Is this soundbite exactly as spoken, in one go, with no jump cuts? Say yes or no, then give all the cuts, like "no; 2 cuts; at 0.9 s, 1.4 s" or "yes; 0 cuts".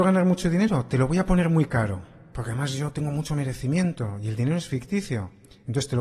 yes; 0 cuts